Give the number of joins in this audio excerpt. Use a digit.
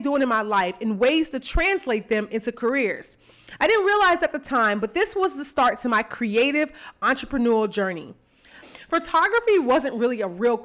1